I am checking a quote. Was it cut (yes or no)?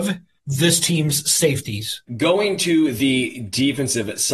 yes